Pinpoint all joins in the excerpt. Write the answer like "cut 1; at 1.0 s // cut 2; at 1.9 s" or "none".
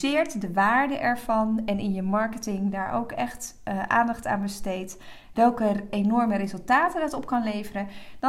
cut 1; at 5.3 s